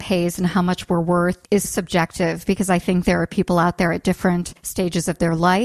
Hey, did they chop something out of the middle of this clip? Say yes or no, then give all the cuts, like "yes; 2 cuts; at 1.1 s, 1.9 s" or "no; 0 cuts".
yes; 1 cut; at 1.6 s